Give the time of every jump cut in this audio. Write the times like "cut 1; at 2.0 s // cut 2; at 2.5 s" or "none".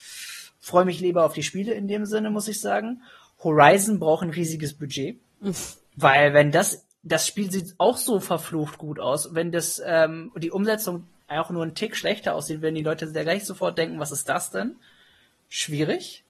none